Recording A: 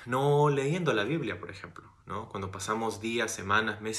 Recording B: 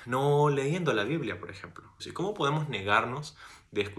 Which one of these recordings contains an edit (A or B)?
B